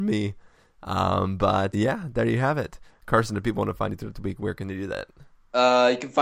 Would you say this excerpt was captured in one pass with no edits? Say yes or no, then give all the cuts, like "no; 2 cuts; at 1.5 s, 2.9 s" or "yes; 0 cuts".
no; 1 cut; at 1.7 s